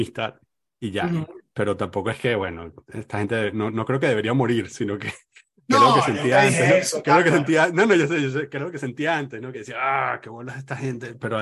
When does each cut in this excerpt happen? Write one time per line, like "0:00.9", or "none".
none